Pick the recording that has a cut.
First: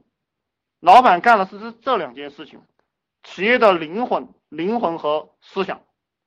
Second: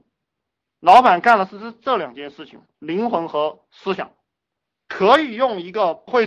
second; 1 cut; at 2.7 s

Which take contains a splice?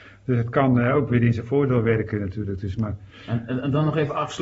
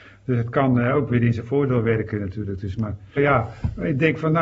second; 1 cut; at 3.2 s

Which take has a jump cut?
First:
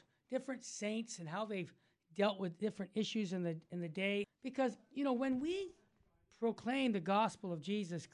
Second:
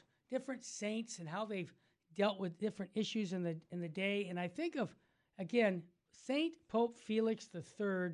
first; 1 cut; at 4.2 s

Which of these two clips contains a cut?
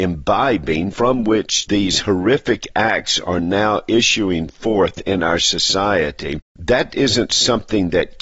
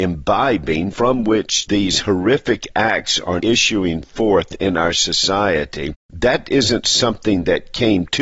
second; 1 cut; at 3.4 s

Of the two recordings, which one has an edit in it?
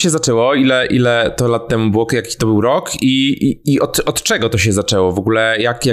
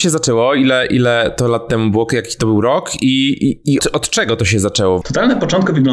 second; 2 cuts; at 3.8 s, 5.0 s

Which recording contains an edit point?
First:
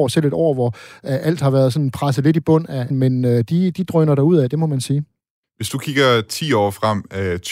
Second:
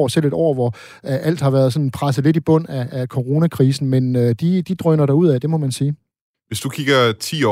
first; 1 cut; at 2.9 s

